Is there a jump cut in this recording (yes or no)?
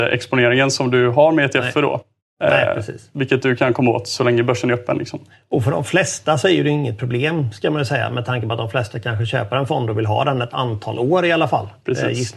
no